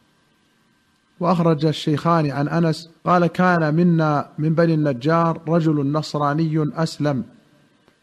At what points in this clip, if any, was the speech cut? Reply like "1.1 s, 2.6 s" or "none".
3.0 s